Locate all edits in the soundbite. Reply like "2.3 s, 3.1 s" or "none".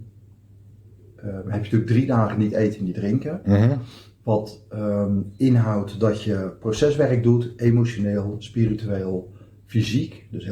none